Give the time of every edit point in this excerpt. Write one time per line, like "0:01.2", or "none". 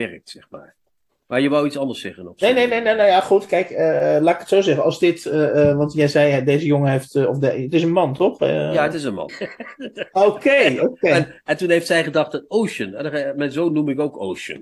0:09.3

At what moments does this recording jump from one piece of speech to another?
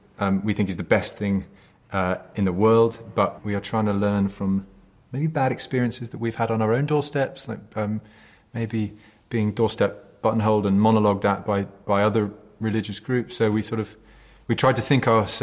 0:03.4

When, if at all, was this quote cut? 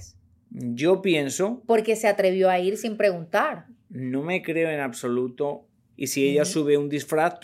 0:05.9

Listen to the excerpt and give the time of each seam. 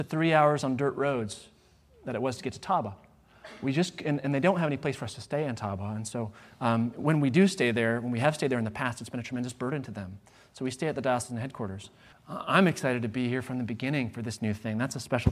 0:12.1

